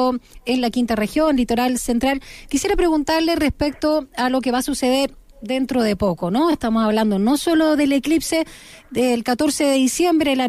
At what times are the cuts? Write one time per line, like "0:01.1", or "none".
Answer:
none